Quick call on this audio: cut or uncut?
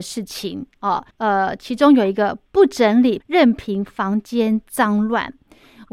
cut